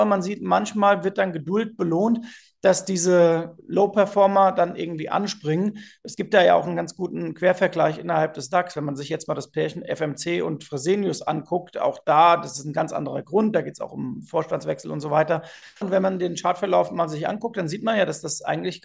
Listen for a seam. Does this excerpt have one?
yes; 1 cut; at 15.8 s

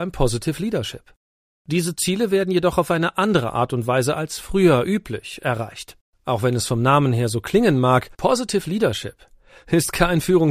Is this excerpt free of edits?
no; 2 cuts; at 6.1 s, 8.1 s

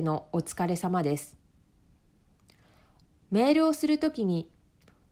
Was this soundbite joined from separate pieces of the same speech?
yes; 1 cut; at 3.1 s

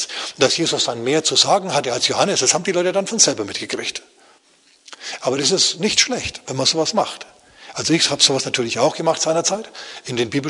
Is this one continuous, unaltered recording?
yes; 0 cuts

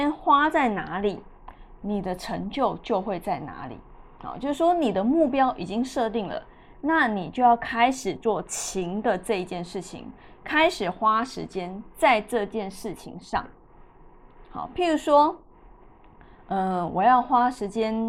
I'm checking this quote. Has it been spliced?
no; 0 cuts

